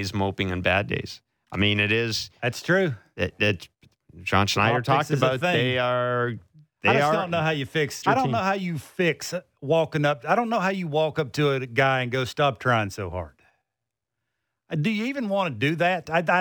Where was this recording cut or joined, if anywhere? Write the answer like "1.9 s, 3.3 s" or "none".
8.0 s